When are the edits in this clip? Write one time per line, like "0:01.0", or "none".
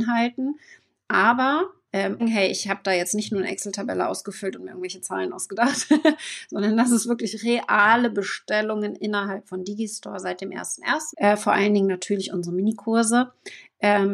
0:02.2
0:11.1